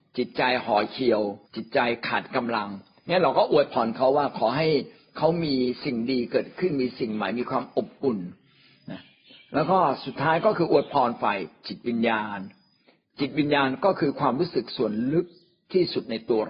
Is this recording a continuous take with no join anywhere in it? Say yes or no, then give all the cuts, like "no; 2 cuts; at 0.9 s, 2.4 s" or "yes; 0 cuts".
no; 1 cut; at 1.5 s